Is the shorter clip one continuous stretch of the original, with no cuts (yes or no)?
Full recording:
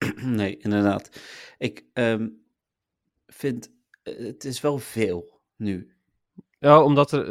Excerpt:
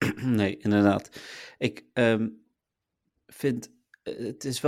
yes